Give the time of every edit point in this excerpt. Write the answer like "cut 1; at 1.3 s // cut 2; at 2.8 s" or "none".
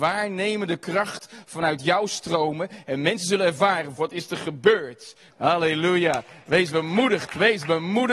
cut 1; at 4.0 s // cut 2; at 5.3 s